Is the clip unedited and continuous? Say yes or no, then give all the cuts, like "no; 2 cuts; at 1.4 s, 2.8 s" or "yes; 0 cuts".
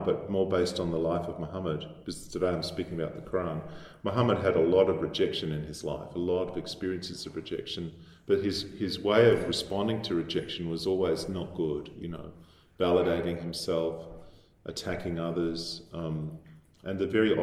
yes; 0 cuts